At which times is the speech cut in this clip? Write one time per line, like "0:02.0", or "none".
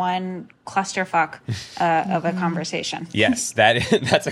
none